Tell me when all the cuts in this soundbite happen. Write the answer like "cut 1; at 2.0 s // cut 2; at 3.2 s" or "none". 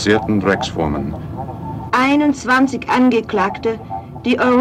cut 1; at 1.9 s